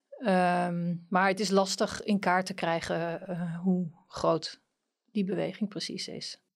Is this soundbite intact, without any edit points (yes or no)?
yes